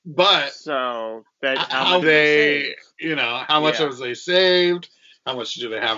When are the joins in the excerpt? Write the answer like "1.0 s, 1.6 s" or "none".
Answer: 2.0 s